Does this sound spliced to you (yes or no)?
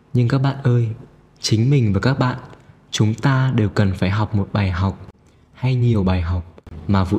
no